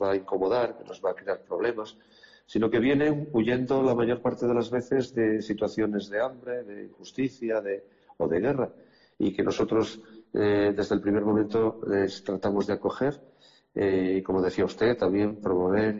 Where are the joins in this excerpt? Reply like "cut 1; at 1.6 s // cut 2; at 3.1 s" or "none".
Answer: none